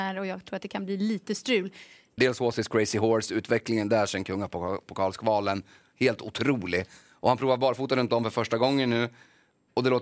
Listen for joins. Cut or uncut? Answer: cut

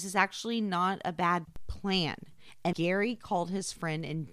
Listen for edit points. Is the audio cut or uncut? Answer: cut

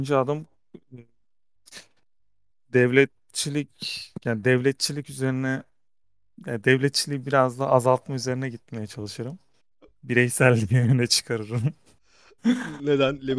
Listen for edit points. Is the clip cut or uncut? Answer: uncut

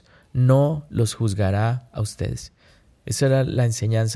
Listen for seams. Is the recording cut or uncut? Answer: uncut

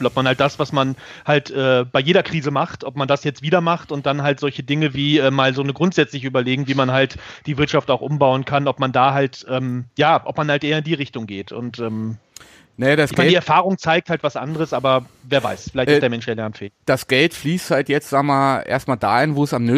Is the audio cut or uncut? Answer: uncut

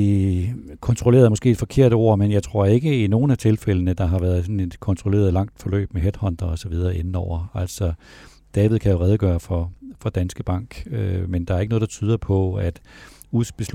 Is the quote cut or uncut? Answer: uncut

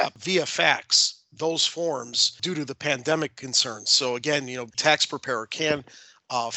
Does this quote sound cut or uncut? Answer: cut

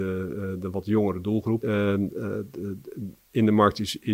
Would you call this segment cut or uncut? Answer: cut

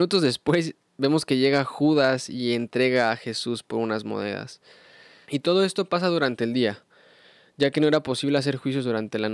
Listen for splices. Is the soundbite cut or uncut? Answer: cut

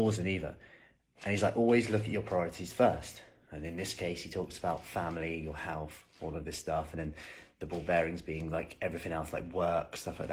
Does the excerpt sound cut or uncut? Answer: uncut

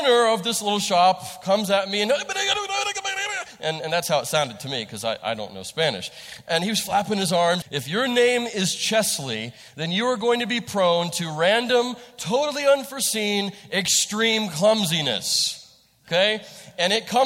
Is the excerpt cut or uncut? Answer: cut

